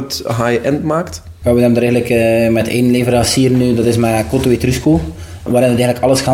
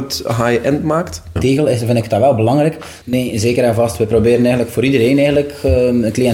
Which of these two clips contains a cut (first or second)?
second